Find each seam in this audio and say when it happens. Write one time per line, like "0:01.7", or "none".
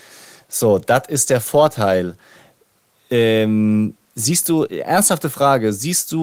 none